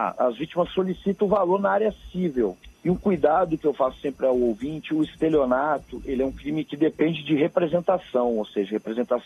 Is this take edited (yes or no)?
yes